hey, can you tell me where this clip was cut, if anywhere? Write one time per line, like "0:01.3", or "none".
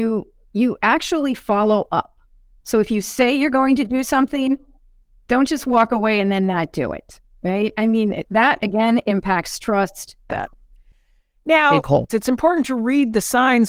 0:10.3
0:12.1